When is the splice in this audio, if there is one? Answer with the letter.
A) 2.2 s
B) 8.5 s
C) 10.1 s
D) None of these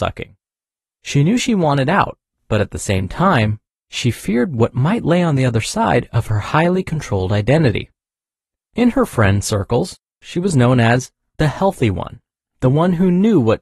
B